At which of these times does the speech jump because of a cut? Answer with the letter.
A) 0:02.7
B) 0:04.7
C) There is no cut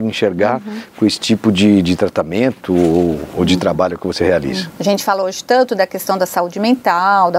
B